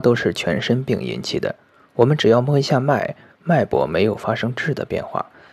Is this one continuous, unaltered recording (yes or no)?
yes